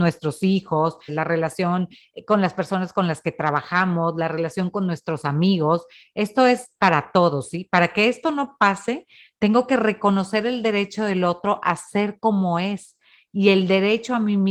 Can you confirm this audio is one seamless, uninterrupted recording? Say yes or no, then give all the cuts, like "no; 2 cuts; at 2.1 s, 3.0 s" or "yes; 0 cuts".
no; 1 cut; at 1.1 s